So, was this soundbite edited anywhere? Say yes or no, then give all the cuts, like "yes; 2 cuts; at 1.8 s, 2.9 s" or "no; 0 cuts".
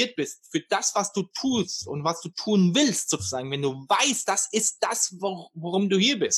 no; 0 cuts